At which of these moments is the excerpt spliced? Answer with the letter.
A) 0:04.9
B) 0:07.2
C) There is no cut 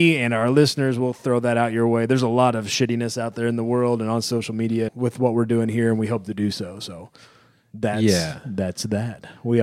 A